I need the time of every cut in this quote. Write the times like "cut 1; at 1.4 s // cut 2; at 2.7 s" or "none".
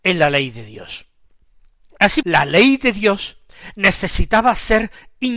cut 1; at 2.2 s